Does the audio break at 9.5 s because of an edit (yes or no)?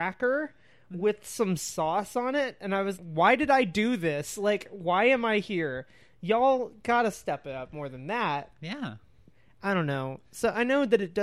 no